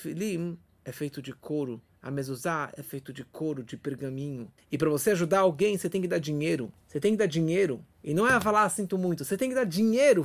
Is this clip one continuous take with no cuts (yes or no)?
yes